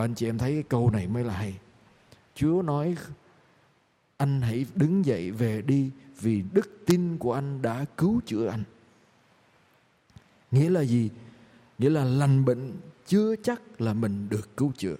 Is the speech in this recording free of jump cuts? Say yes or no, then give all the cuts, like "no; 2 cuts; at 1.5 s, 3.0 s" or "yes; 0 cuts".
yes; 0 cuts